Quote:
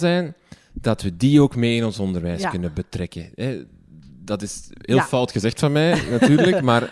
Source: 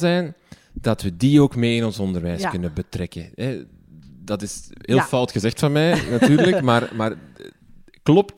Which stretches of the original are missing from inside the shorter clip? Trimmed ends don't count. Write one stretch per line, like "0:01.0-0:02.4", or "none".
none